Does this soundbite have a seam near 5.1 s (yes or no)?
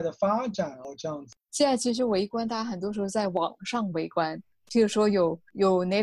no